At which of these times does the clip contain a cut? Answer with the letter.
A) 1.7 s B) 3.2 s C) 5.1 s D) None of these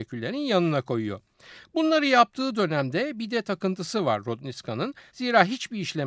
C